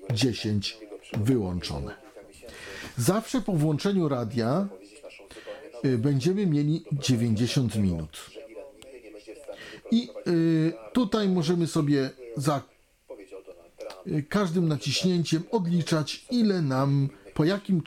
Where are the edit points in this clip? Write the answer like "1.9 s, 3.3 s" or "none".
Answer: none